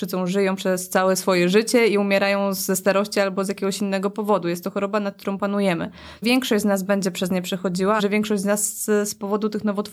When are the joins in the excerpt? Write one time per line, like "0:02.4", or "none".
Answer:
0:06.2
0:08.0

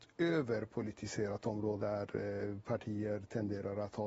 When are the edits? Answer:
0:01.8

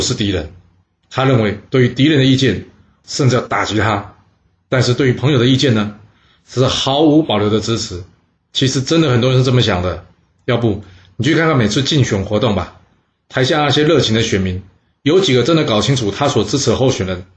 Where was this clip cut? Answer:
0:03.0
0:08.4

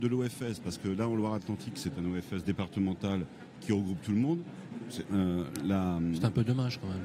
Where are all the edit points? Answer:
0:05.1

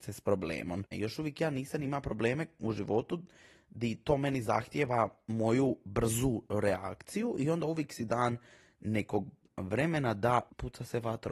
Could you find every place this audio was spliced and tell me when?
0:00.9

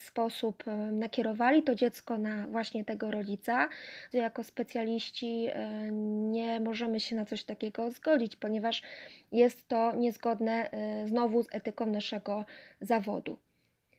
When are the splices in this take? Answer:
0:04.1

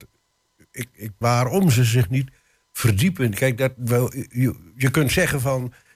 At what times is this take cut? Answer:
0:01.2

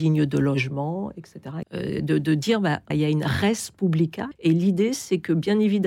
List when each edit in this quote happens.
0:01.6
0:02.9
0:04.3

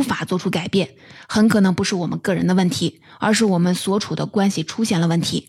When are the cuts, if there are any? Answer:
none

